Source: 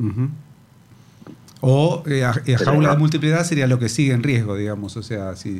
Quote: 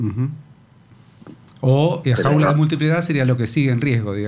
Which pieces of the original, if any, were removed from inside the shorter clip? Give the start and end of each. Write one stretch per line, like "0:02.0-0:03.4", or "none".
0:02.0-0:02.5